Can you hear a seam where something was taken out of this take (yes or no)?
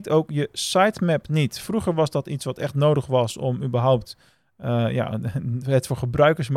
no